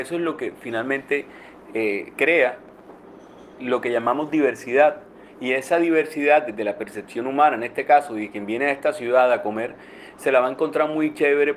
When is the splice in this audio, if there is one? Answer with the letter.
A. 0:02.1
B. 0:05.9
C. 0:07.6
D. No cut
A